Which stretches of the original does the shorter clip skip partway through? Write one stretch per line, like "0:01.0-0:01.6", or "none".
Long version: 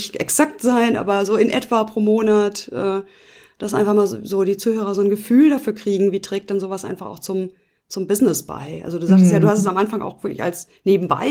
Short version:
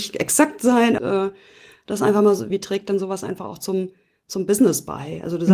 0:01.0-0:02.7
0:04.2-0:06.1